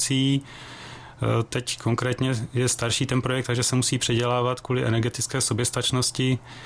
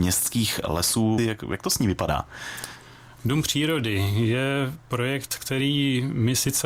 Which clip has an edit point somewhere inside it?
second; 1 cut; at 1.2 s

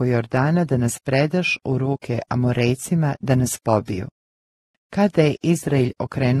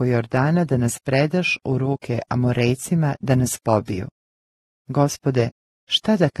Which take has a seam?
first; 1 cut; at 4.7 s

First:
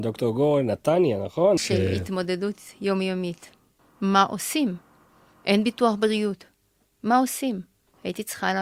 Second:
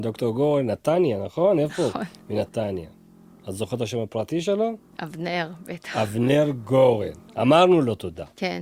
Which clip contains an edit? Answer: first; 2 cuts; at 1.6 s, 3.8 s

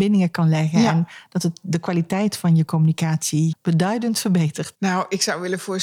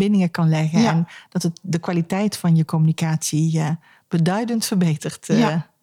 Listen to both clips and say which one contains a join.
first; 2 cuts; at 3.5 s, 4.7 s

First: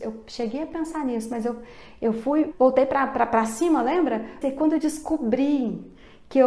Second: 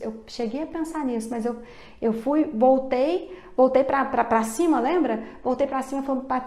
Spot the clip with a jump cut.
first; 2 cuts; at 2.5 s, 4.4 s

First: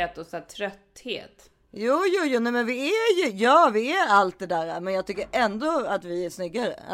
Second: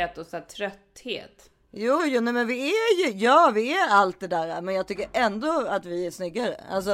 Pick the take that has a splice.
second; 1 cut; at 2.0 s

